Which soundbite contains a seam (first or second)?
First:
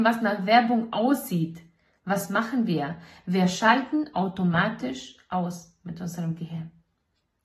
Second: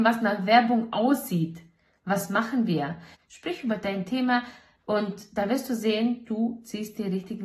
second